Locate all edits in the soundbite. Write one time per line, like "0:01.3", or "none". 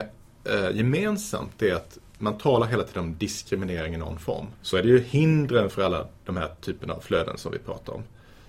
0:04.6